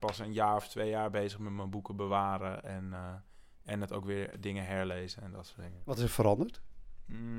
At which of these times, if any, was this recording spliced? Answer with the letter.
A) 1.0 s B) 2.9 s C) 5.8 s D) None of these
D